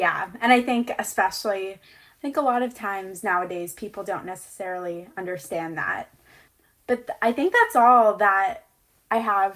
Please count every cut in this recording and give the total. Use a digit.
0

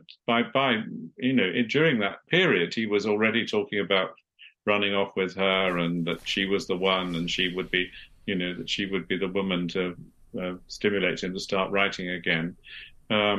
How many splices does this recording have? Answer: 1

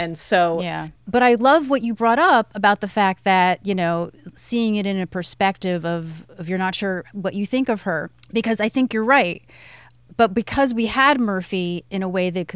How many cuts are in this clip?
1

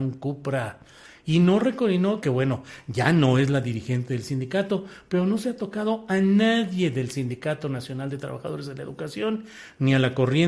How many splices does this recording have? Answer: 1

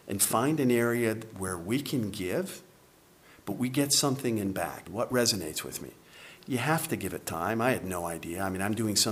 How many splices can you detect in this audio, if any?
1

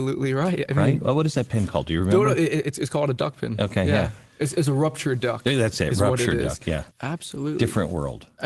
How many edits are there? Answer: 1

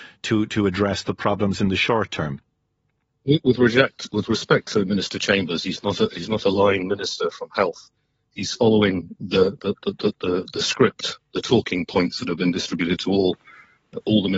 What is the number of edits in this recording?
0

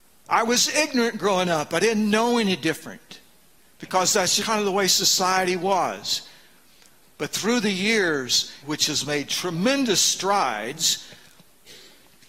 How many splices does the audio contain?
2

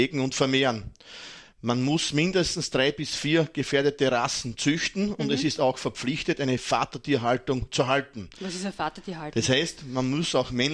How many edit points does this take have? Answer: 0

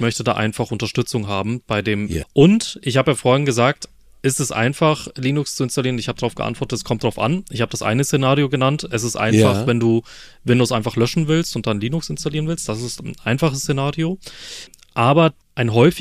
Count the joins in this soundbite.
1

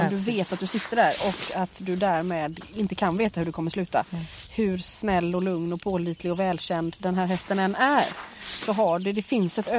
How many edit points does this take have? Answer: 0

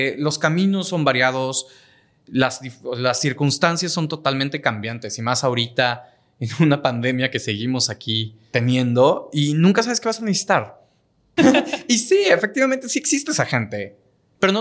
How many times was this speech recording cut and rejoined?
2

